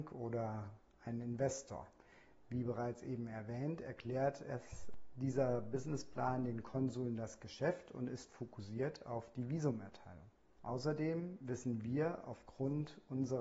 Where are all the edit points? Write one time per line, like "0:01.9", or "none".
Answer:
0:10.6